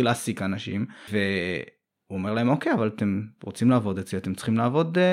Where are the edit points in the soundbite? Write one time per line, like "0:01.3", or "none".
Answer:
0:01.1